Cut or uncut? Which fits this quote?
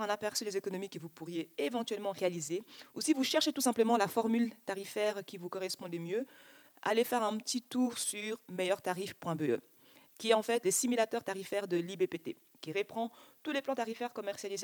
uncut